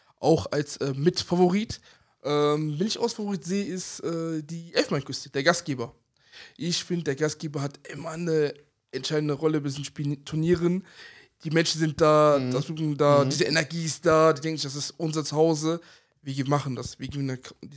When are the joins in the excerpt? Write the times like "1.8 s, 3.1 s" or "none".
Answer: none